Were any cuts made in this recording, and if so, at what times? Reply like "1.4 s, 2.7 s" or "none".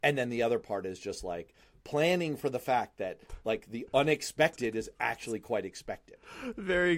none